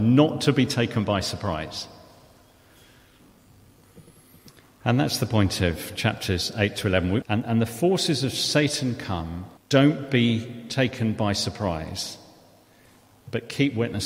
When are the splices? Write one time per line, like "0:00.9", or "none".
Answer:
0:07.2
0:09.6